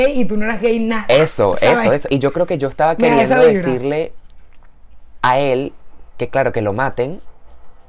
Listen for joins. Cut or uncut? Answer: uncut